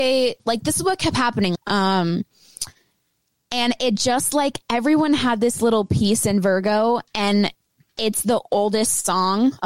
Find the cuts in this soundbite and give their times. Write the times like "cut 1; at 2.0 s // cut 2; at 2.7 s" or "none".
cut 1; at 1.5 s